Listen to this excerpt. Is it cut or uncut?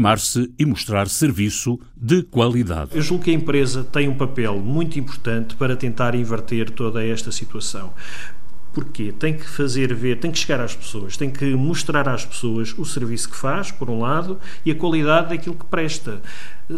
uncut